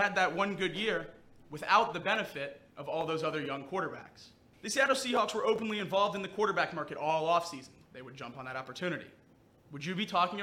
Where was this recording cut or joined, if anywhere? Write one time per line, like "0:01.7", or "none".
0:04.5
0:07.9